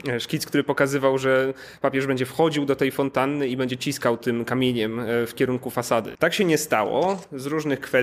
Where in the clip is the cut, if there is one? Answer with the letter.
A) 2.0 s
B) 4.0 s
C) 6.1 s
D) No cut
C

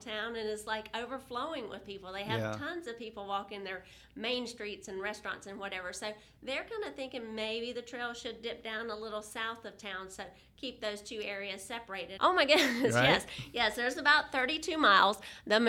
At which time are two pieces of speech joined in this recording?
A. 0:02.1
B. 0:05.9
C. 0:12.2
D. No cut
C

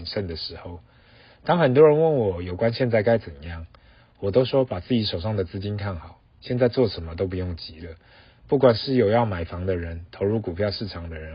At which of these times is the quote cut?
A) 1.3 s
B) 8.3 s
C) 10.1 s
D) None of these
D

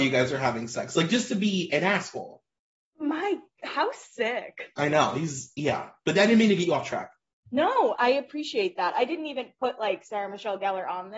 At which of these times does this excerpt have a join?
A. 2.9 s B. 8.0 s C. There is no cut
B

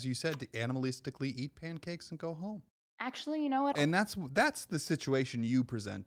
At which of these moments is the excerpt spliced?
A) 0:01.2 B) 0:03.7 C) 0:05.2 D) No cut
B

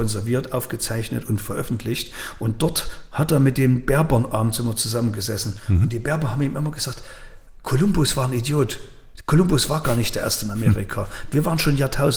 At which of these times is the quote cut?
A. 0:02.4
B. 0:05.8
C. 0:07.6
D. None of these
C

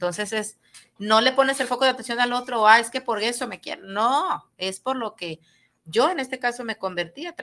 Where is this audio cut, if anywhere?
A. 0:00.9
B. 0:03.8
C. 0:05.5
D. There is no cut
D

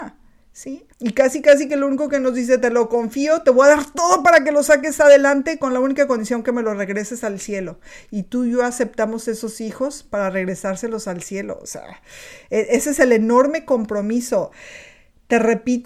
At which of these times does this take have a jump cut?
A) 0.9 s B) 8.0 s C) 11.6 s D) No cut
A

